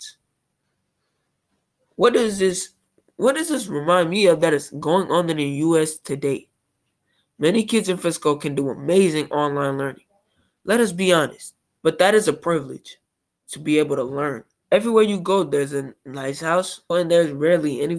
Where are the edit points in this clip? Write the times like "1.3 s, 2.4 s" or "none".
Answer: 11.8 s, 14.6 s, 16.9 s